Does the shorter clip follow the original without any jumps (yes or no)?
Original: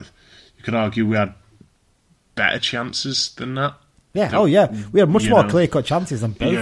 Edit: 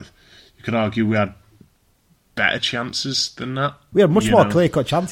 no